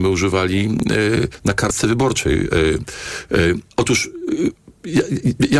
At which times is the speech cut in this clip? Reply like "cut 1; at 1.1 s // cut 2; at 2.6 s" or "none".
cut 1; at 3.7 s